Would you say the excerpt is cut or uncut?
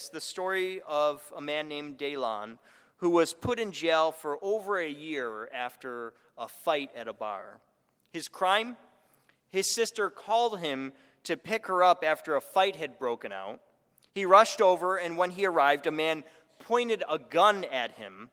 uncut